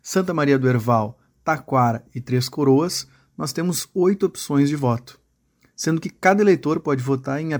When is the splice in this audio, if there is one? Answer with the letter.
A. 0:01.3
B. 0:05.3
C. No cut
C